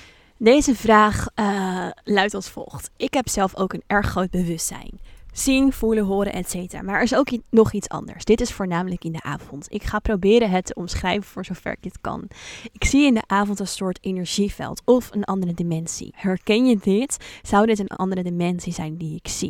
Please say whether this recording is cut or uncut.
cut